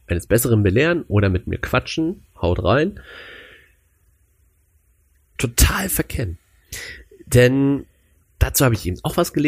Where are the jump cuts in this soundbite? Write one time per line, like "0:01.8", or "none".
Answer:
0:02.3
0:05.4